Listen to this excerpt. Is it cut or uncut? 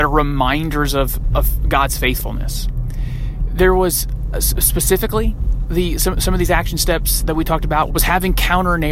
cut